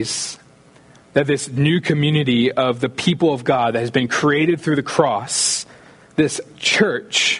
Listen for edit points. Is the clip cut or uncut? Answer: uncut